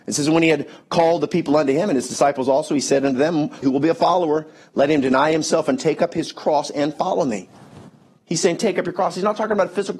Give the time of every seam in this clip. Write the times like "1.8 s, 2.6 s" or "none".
3.6 s, 8.2 s